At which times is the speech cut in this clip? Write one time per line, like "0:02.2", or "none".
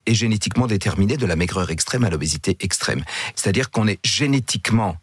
0:03.3